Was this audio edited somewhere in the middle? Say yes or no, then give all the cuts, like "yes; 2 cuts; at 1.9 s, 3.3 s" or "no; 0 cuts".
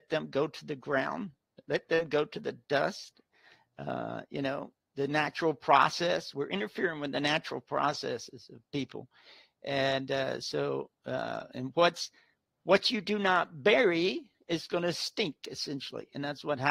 no; 0 cuts